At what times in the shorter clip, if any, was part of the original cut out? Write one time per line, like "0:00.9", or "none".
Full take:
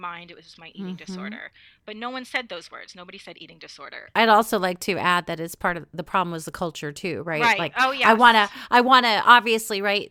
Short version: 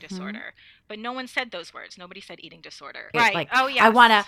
0:03.1